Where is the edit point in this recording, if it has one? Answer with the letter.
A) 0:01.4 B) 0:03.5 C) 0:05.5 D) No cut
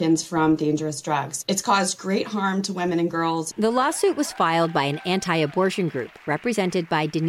B